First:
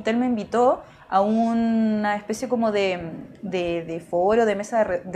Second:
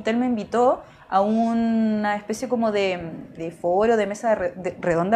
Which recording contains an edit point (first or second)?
second